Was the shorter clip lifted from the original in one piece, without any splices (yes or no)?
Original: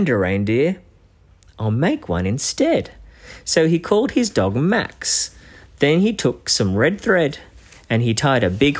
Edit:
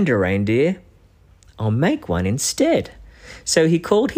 yes